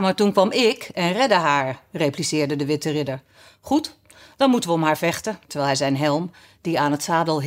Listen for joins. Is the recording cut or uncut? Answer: cut